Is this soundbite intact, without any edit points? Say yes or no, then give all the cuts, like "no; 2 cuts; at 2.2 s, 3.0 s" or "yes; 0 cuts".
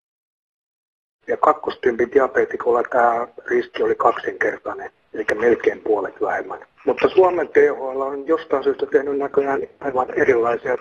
no; 1 cut; at 1.2 s